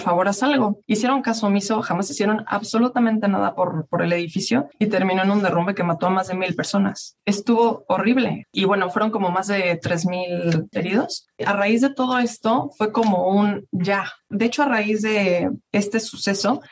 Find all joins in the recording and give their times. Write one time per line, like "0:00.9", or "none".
none